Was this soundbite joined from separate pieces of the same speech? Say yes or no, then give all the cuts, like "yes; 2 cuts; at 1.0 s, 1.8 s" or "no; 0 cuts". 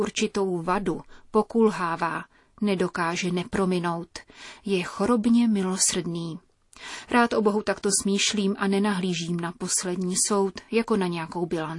no; 0 cuts